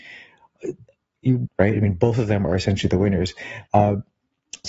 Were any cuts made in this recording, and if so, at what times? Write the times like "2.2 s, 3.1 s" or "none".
1.5 s, 3.7 s